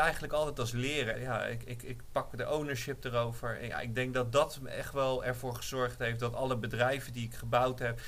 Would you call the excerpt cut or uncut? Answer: cut